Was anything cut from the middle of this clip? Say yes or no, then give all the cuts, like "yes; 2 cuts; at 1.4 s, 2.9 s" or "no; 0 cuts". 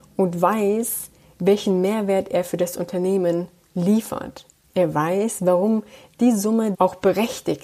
yes; 1 cut; at 6.7 s